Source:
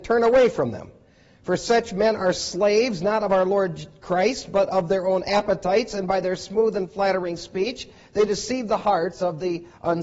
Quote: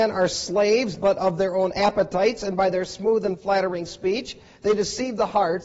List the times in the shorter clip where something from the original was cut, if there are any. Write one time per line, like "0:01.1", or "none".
0:00.9